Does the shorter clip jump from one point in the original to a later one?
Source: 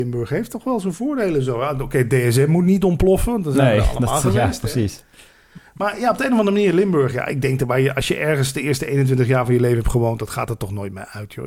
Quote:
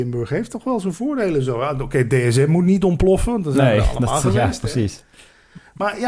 no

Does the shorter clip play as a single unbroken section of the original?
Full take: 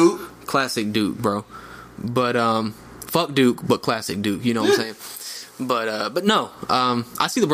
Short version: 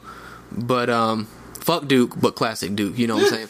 yes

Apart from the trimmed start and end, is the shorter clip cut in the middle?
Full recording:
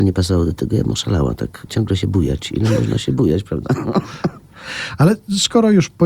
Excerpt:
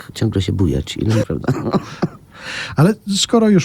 yes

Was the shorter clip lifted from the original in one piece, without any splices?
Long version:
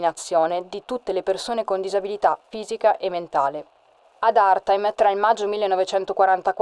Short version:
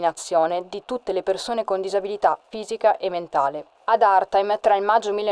no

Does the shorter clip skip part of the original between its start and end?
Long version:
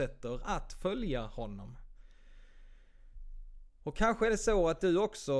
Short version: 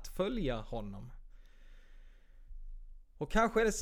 no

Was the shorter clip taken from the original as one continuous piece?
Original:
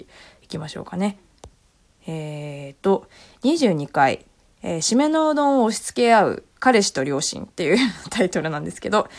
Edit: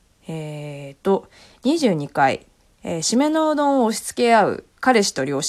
yes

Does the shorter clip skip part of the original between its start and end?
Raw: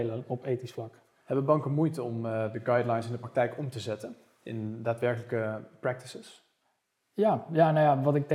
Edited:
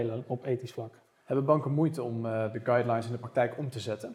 no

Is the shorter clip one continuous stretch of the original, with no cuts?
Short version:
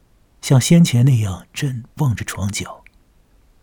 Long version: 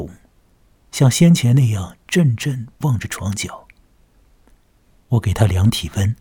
no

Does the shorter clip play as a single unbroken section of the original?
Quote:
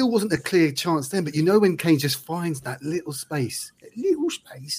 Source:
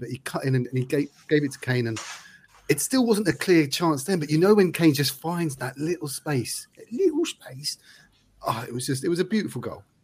yes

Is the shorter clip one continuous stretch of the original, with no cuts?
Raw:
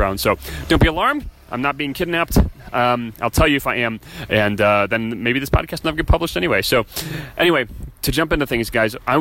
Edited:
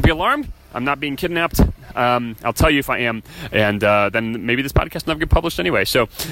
yes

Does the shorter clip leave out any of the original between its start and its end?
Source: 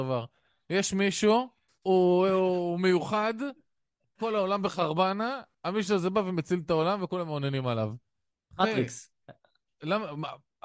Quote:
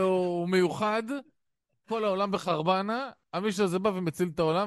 no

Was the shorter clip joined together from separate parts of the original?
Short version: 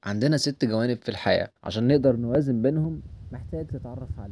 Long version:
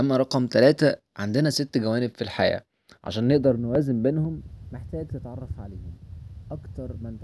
yes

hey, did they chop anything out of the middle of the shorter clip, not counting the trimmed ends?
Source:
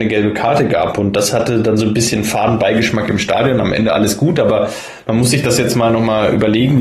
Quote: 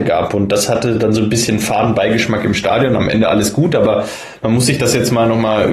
no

